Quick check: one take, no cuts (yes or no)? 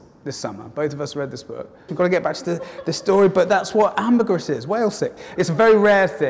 no